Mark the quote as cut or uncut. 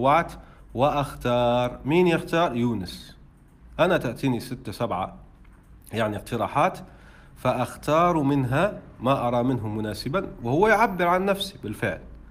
uncut